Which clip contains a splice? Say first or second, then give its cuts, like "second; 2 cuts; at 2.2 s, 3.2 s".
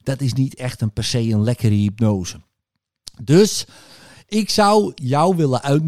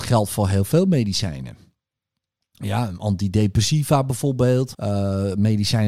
second; 1 cut; at 4.7 s